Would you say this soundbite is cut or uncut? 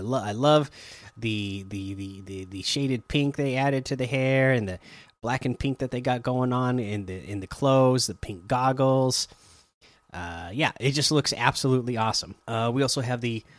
cut